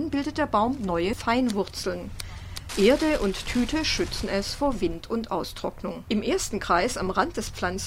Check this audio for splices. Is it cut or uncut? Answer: cut